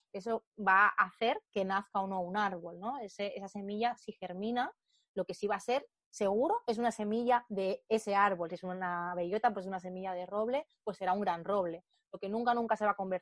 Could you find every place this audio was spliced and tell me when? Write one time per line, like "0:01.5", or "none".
none